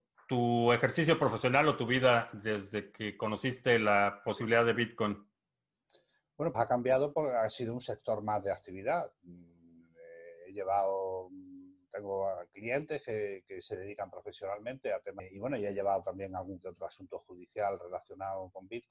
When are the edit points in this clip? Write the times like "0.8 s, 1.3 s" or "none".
6.5 s